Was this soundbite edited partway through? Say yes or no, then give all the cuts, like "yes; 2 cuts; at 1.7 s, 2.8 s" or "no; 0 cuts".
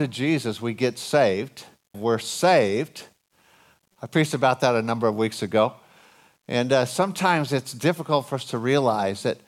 yes; 2 cuts; at 1.9 s, 3.8 s